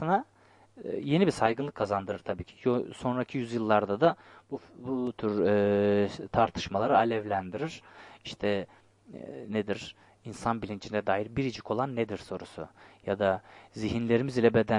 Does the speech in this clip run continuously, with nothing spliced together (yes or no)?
yes